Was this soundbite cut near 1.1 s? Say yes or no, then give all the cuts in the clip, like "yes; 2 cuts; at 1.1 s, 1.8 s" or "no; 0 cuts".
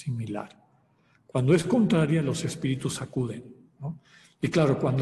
no; 1 cut; at 3.8 s